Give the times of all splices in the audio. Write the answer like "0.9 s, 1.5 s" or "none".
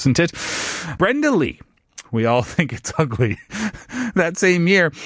1.0 s, 2.0 s